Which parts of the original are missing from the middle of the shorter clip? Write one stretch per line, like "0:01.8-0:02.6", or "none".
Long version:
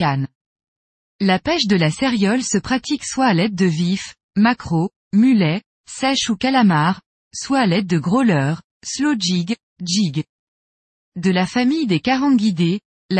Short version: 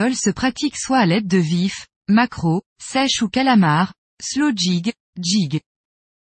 0:04.9-0:05.7
0:07.2-0:08.7